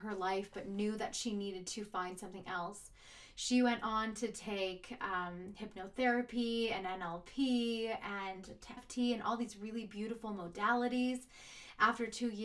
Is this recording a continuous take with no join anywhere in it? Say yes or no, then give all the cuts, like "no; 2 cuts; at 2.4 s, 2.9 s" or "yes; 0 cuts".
no; 1 cut; at 8.8 s